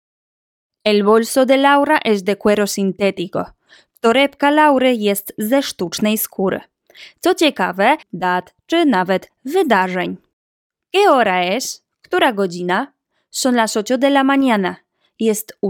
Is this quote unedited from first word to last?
no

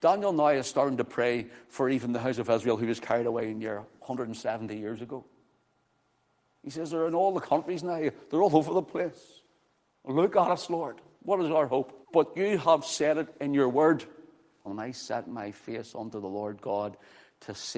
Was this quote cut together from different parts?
yes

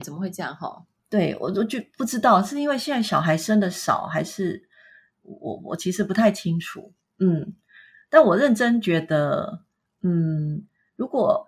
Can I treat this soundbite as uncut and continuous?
yes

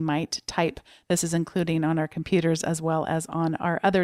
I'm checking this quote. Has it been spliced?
no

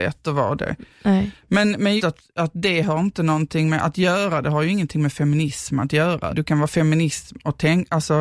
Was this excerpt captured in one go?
no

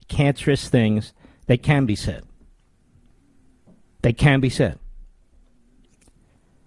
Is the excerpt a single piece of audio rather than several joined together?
yes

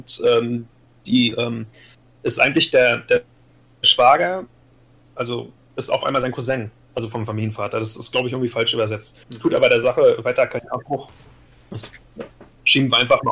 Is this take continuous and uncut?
yes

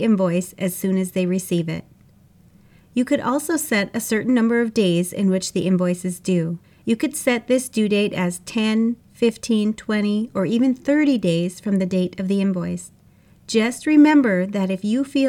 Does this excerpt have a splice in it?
no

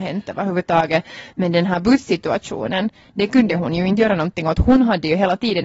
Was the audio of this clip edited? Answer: no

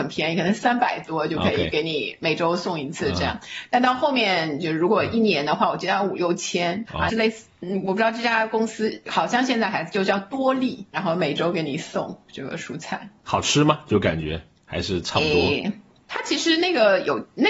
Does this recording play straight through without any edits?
no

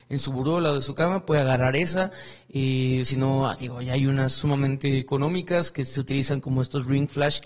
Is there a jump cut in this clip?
no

